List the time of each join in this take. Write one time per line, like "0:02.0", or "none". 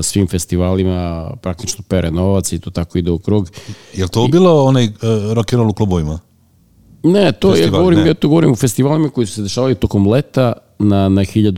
none